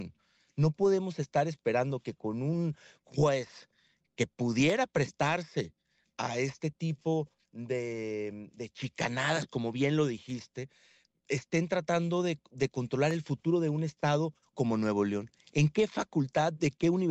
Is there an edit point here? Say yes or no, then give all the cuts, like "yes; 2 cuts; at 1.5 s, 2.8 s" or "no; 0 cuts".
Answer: no; 0 cuts